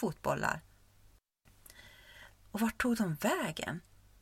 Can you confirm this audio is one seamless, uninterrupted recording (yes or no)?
no